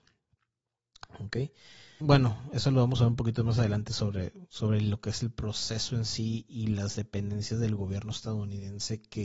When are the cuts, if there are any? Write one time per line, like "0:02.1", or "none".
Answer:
0:02.0